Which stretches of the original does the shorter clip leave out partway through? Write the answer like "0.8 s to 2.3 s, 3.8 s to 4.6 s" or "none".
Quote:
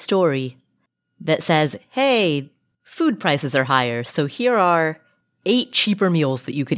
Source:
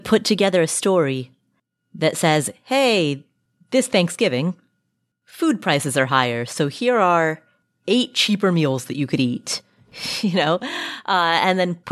3.5 s to 5.2 s